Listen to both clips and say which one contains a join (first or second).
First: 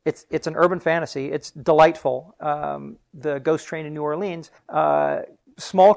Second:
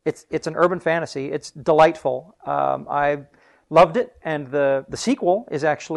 first